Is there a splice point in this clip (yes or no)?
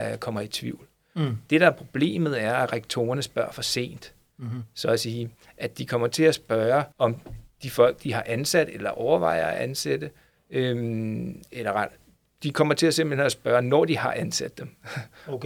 yes